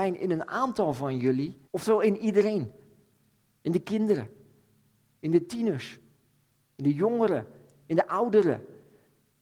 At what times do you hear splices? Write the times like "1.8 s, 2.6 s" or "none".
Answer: 1.6 s